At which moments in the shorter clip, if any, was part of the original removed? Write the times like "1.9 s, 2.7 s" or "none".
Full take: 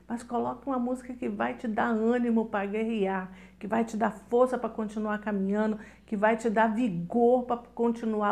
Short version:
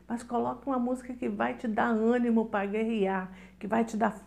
none